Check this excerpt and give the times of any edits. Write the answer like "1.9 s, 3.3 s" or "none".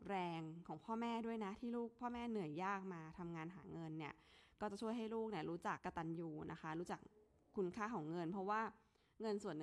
5.8 s